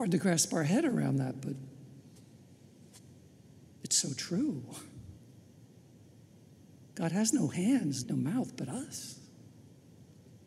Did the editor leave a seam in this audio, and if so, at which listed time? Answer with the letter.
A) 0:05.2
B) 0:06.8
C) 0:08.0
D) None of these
C